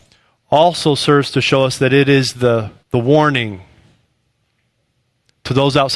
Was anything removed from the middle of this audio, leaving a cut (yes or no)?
yes